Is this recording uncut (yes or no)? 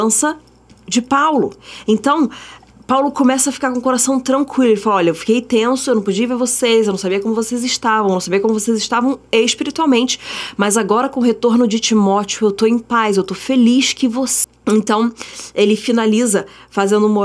yes